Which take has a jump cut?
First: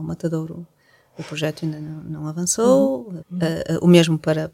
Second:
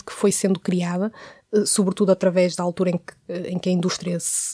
first; 1 cut; at 3.2 s

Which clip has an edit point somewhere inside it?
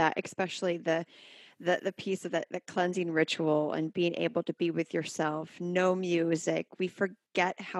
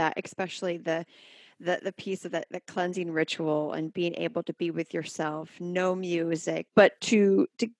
second; 1 cut; at 6.7 s

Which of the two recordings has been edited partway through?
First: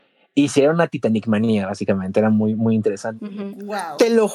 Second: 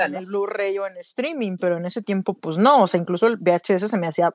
first; 1 cut; at 3.2 s

